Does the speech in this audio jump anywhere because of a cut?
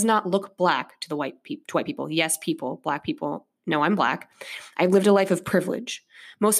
no; 0 cuts

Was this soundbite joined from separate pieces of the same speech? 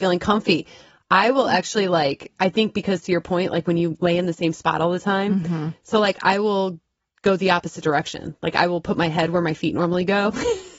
no; 0 cuts

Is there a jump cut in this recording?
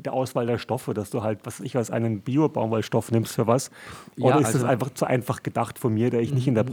no; 0 cuts

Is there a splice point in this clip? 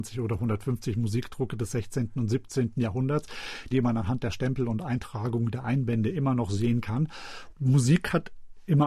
yes; 2 cuts; at 3.7 s, 7.5 s

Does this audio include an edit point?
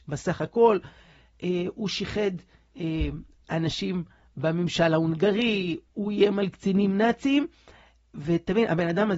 no; 0 cuts

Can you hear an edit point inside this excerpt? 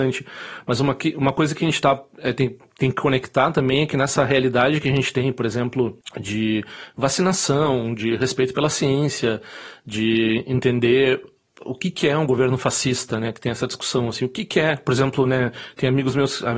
no; 0 cuts

